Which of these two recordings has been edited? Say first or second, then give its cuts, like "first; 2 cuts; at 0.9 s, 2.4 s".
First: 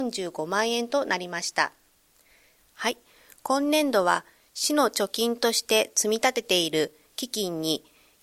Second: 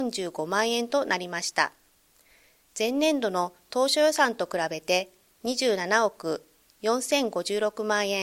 first; 1 cut; at 2.6 s